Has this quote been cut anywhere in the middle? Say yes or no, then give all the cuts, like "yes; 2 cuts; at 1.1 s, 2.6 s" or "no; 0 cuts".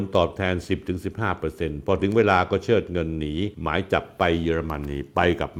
yes; 1 cut; at 3.5 s